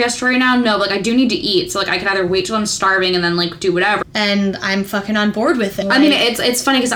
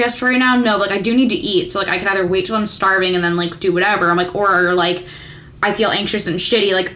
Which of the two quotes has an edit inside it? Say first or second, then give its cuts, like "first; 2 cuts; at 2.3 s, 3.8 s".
first; 2 cuts; at 4.0 s, 5.8 s